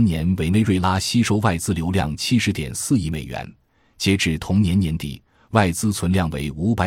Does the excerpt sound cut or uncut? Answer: uncut